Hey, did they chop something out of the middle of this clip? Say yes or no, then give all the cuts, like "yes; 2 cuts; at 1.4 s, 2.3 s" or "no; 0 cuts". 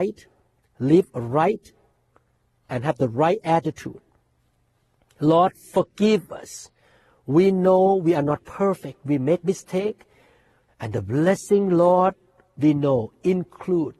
yes; 1 cut; at 10.7 s